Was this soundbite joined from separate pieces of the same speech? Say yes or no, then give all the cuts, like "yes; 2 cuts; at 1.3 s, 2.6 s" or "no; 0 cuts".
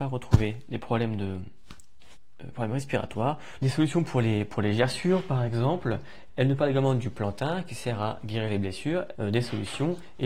yes; 3 cuts; at 3.6 s, 6.3 s, 9.2 s